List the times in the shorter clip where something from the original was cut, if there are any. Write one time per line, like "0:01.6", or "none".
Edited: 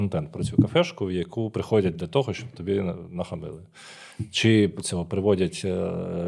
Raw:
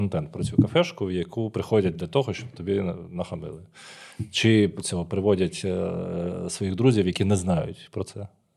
none